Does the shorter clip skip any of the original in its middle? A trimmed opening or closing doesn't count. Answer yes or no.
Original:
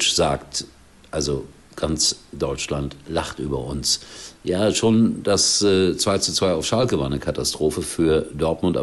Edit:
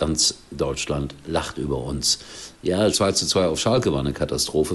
yes